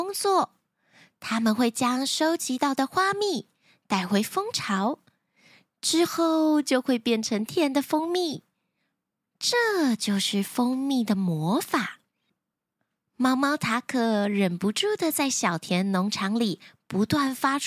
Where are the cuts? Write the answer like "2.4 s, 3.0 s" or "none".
7.5 s